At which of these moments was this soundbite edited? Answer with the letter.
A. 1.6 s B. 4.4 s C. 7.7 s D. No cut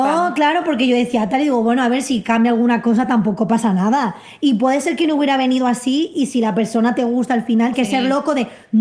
C